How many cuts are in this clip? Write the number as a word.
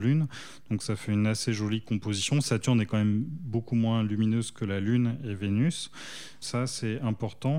one